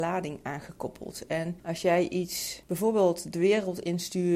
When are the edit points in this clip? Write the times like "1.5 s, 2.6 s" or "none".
none